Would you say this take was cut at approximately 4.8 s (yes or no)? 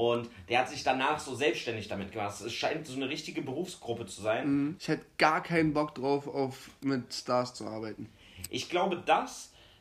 yes